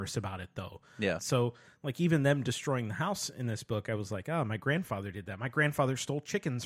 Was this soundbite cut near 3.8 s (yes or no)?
no